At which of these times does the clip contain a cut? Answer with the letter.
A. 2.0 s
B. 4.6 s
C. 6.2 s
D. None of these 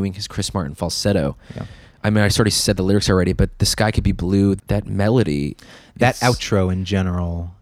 B